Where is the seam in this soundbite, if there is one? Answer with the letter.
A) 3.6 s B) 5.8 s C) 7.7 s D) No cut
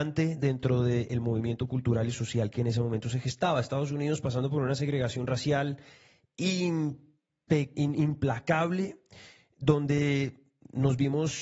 C